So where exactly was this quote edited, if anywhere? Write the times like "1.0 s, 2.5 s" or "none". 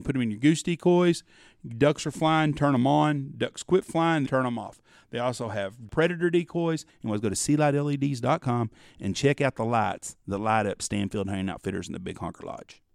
4.2 s, 6.9 s